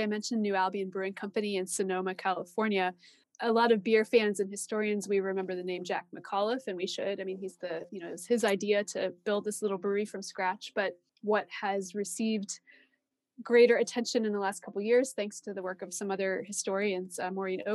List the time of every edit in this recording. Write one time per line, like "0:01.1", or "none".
0:11.1